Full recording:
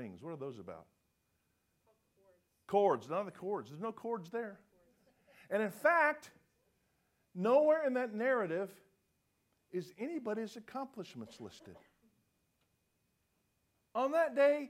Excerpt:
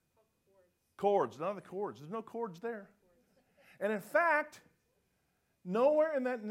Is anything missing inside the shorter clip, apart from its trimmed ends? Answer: no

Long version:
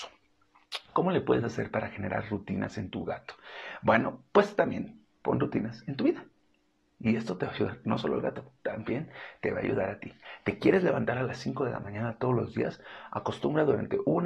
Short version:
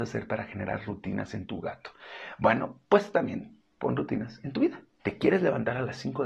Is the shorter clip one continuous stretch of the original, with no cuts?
no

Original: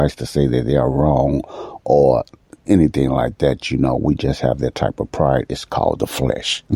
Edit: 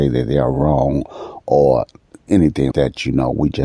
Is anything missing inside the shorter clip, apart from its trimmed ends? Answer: yes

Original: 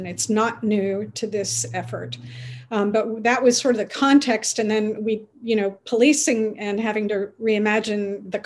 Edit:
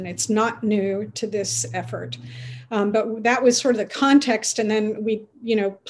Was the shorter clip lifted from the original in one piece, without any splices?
yes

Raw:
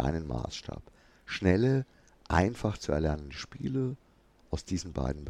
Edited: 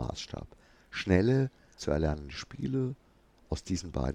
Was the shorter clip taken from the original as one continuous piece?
no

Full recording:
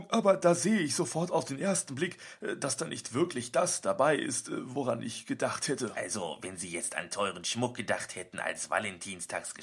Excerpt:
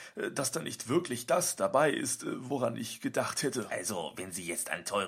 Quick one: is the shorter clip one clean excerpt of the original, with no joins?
yes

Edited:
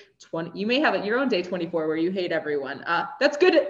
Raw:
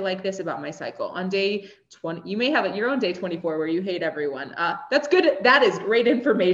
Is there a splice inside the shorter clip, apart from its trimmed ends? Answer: no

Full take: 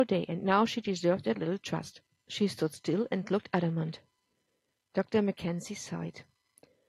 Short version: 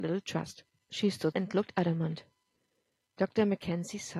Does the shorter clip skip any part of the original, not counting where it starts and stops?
yes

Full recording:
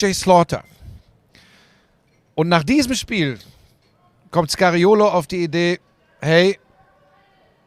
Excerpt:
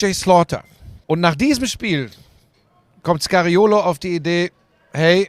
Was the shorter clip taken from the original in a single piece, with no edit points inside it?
no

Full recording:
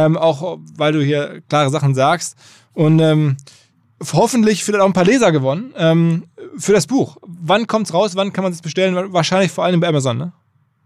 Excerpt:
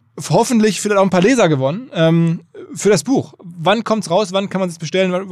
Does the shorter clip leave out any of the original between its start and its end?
no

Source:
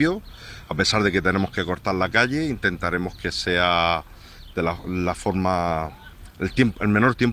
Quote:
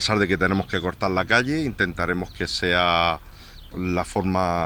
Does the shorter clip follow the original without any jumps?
no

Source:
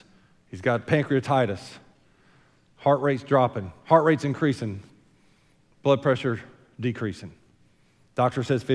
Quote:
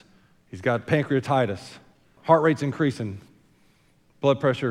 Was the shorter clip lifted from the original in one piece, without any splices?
no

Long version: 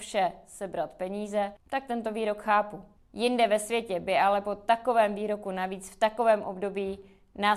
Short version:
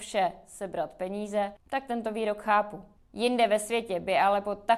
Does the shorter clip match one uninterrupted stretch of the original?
yes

